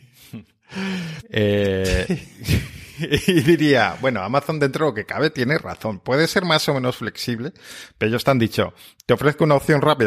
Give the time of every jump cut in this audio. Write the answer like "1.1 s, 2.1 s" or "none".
1.2 s

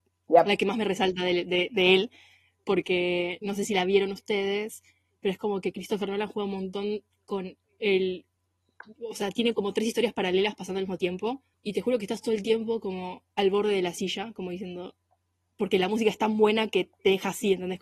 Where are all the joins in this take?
none

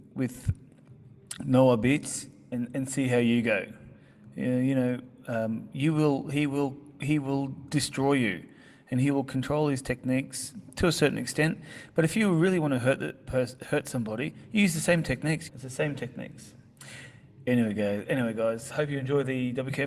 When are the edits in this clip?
15.5 s, 18.7 s

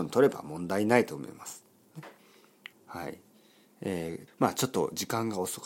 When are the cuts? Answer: 2.7 s, 4.3 s

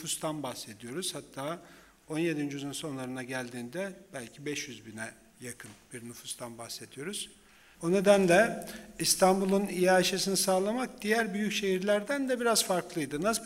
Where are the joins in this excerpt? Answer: 7.7 s

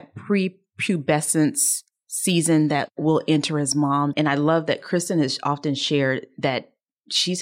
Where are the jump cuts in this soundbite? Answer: 4.1 s

